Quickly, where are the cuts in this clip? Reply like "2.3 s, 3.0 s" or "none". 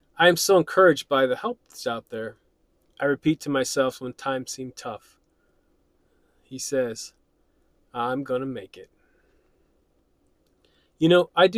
2.8 s, 7.8 s